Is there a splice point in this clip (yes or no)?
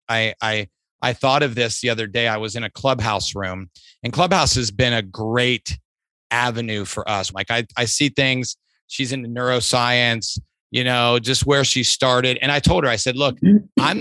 yes